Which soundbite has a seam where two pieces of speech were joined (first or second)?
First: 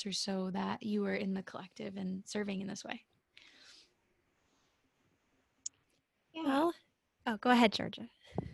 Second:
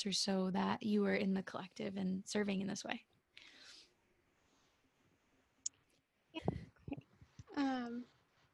second